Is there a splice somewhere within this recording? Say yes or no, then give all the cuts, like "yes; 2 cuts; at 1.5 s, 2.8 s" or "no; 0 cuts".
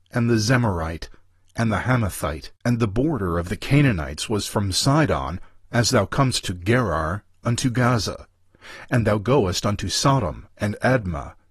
yes; 2 cuts; at 2.6 s, 10.5 s